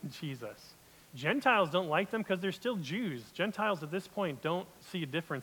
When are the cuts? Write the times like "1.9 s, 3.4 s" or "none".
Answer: 1.0 s

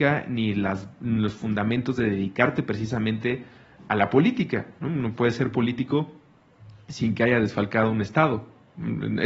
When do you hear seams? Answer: none

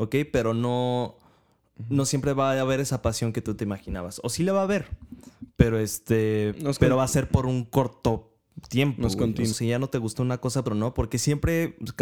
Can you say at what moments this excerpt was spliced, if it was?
9.5 s, 10.7 s

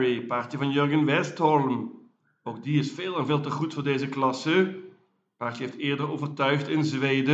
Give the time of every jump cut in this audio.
none

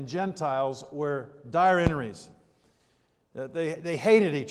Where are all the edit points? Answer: none

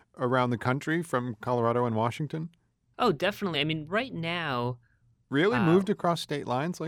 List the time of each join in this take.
none

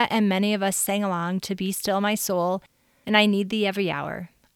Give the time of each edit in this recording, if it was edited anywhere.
none

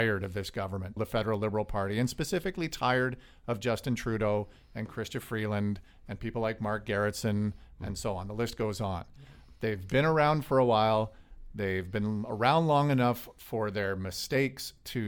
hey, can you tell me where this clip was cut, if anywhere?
1.0 s

